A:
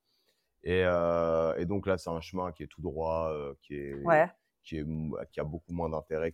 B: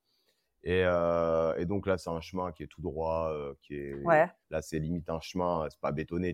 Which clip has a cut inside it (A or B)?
B